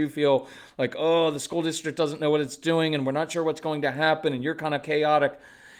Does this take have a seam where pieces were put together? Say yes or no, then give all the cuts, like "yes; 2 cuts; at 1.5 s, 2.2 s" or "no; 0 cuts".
no; 0 cuts